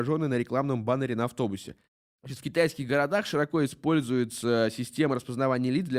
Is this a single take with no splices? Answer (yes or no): yes